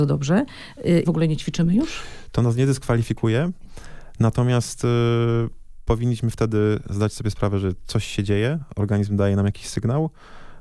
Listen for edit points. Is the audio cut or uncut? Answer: cut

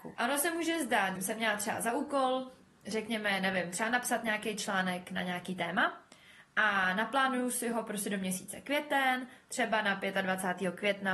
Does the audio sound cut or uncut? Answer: cut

